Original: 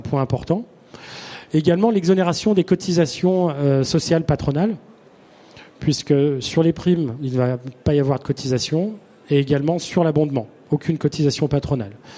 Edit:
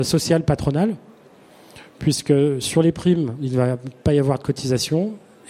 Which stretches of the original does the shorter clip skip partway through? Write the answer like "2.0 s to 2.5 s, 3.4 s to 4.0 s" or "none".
none